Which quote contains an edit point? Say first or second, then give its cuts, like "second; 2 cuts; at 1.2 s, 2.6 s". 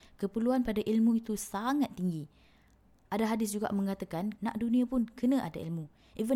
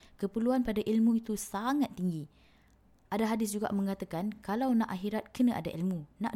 first; 1 cut; at 4.4 s